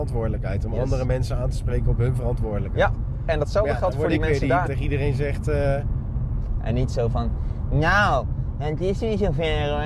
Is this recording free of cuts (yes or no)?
no